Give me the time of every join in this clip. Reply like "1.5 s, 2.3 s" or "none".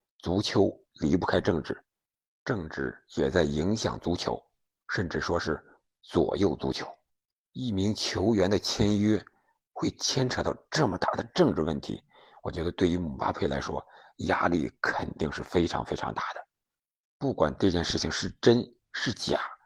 none